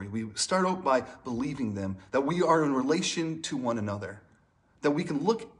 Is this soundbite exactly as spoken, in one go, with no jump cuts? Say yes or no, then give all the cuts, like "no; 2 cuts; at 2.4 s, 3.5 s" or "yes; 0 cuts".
yes; 0 cuts